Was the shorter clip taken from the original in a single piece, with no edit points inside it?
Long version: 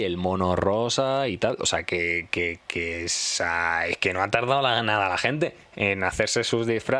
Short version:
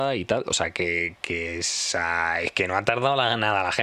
no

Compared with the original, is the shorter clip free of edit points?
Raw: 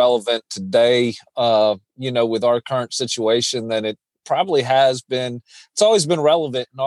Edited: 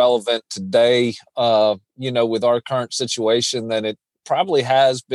yes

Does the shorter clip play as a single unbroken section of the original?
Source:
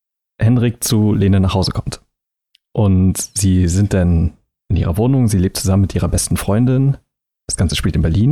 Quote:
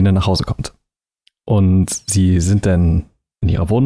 yes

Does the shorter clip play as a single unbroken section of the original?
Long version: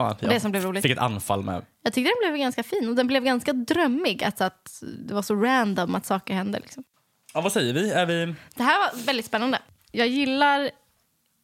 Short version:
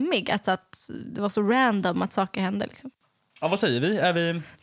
yes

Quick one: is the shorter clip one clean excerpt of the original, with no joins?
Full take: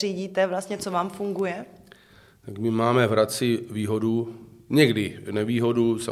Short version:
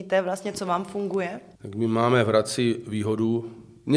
no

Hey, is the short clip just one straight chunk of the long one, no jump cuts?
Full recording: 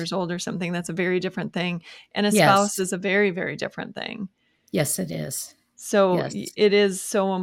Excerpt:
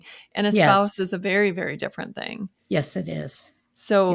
no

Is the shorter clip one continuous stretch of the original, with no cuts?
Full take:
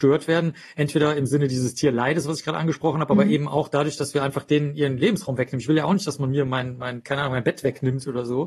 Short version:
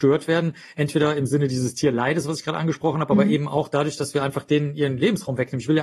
yes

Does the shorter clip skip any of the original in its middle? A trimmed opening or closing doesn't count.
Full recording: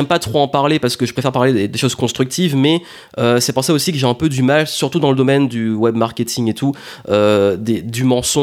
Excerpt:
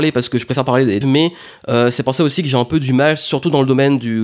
yes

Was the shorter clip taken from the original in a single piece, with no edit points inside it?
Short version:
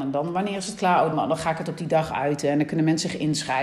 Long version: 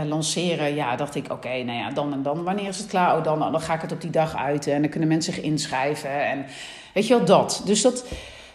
no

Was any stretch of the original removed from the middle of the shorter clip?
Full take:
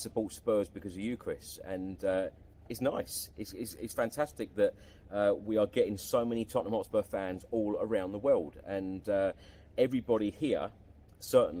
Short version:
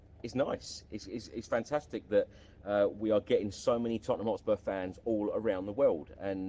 no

